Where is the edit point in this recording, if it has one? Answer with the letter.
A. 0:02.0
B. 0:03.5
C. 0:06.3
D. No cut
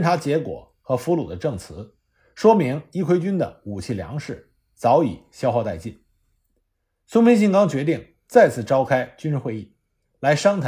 D